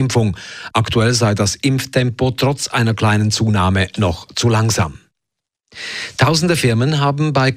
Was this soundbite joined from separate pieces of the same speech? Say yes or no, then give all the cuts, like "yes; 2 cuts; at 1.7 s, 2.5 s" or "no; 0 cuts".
no; 0 cuts